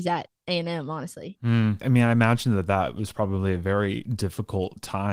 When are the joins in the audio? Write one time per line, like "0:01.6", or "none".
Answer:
0:01.8